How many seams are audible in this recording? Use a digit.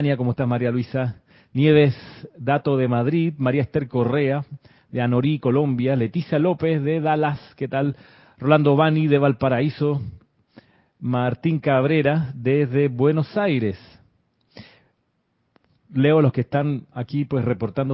0